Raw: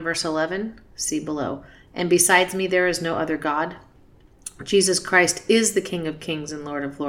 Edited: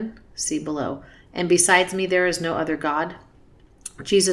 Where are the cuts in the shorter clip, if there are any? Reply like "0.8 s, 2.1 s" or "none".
none